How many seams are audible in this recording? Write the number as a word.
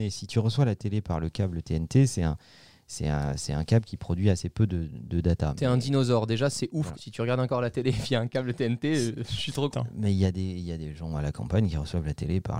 two